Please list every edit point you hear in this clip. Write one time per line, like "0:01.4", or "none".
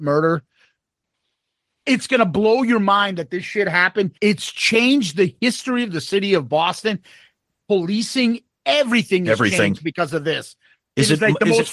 0:04.2